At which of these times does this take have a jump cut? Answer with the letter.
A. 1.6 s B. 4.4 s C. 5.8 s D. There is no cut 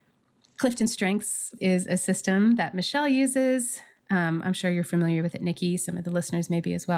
A